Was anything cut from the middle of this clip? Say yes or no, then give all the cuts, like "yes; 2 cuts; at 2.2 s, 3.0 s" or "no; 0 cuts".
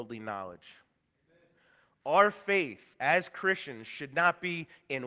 no; 0 cuts